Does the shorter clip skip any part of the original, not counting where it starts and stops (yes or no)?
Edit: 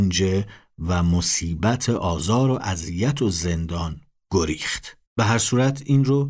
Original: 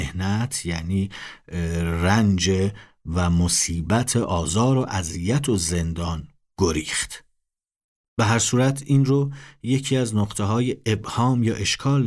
yes